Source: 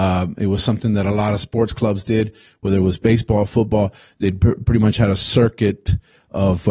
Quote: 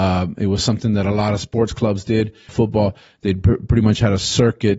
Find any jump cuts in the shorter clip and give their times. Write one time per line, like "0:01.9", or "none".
0:02.5